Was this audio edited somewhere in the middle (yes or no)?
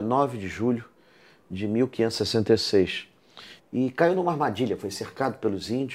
yes